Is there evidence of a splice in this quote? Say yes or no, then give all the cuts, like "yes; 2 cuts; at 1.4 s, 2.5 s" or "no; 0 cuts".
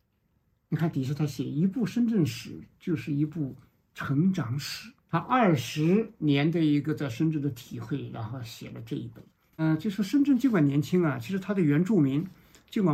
yes; 2 cuts; at 5.0 s, 9.5 s